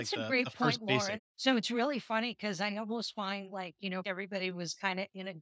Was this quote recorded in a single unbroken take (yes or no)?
no